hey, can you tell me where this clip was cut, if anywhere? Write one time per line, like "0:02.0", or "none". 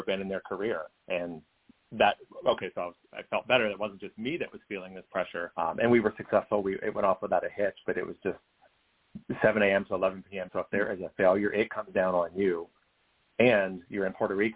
0:10.5